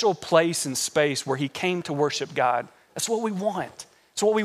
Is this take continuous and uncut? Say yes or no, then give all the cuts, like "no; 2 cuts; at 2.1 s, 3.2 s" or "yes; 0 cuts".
yes; 0 cuts